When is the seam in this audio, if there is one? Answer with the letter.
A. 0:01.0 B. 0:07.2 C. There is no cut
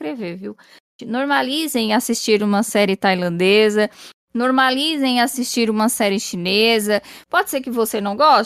A